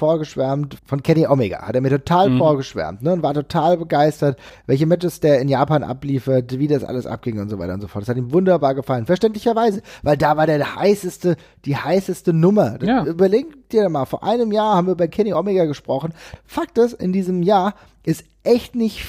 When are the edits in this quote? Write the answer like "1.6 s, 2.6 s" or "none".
16.4 s